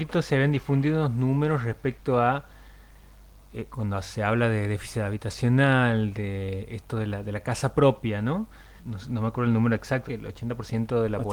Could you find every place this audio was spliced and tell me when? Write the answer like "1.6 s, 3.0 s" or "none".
8.8 s, 10.1 s